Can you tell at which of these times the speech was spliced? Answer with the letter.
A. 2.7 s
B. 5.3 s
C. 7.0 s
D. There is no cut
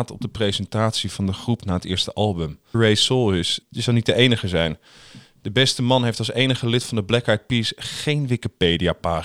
A